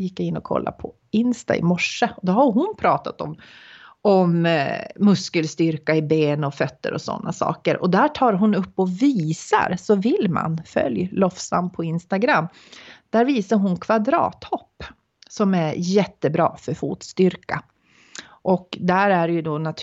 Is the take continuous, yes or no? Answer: yes